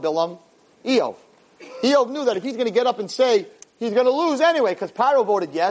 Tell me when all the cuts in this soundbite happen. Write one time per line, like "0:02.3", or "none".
0:03.6